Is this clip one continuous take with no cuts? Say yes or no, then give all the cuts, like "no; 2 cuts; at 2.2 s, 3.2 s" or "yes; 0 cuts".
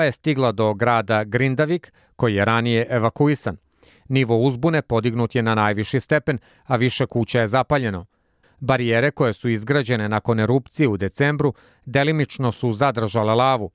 no; 1 cut; at 8.4 s